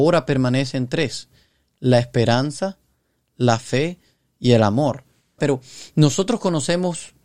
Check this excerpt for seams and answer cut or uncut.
cut